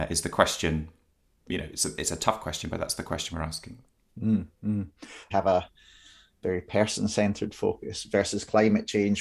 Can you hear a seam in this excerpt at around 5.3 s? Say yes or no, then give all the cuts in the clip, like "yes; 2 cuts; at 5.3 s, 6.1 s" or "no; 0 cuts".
yes; 1 cut; at 5.3 s